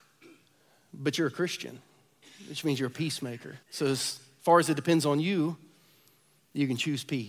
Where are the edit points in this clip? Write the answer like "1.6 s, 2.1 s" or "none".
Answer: 3.6 s